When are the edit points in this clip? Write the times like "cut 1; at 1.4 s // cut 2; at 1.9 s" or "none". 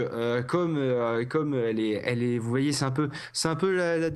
none